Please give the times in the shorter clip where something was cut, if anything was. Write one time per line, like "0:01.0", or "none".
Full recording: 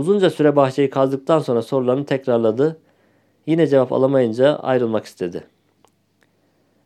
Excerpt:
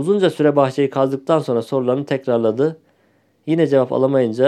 none